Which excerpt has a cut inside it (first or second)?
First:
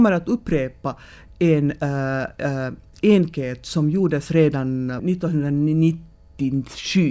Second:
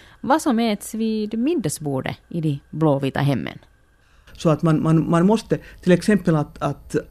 second